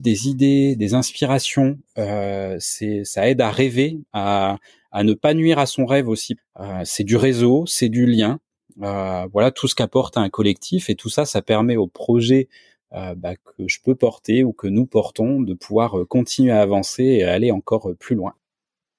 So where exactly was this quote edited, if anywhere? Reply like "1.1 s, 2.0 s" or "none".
6.4 s

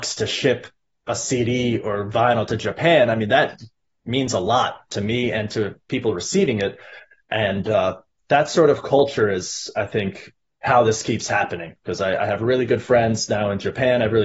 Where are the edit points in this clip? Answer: none

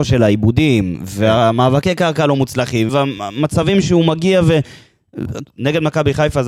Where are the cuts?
2.9 s, 5.4 s

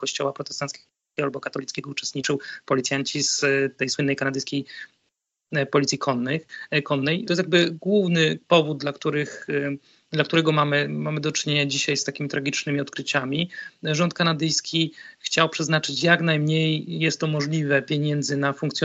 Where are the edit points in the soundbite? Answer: 7.2 s

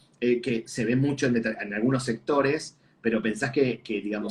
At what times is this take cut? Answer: none

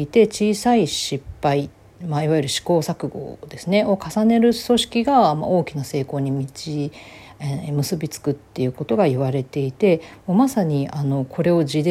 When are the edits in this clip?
none

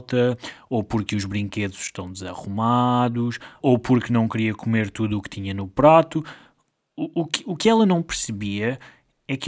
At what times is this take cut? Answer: 3.6 s

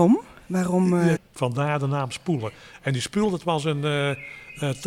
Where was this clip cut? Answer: 1.2 s

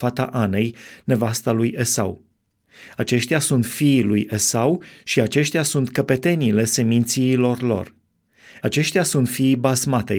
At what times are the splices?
8.6 s

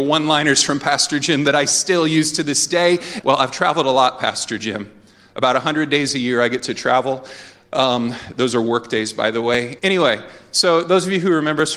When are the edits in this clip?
3.2 s, 9.8 s

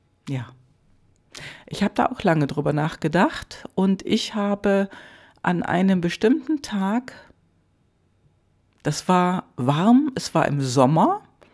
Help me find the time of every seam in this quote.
none

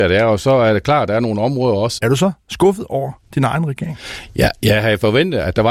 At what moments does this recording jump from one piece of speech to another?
2.0 s

